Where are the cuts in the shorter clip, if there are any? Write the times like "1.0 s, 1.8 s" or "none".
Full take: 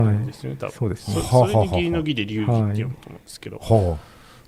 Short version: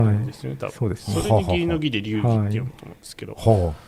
1.2 s